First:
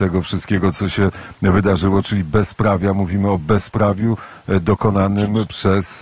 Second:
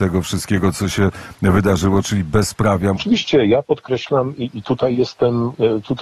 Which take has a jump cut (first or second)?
second